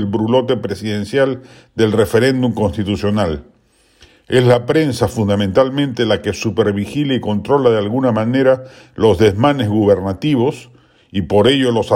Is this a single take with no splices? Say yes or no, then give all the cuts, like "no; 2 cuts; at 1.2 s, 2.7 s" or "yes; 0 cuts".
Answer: yes; 0 cuts